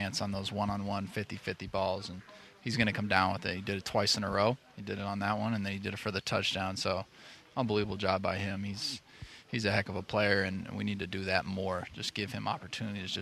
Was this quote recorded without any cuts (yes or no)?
yes